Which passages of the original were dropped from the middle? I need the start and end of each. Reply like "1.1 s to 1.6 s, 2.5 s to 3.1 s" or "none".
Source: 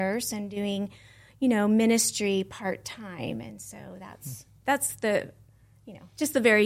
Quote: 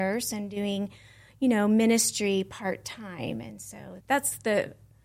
4.0 s to 4.6 s